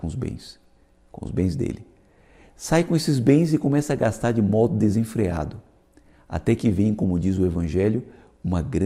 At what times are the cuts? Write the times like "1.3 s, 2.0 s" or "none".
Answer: none